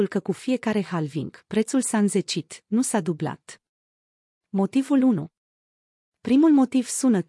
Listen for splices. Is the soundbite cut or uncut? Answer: uncut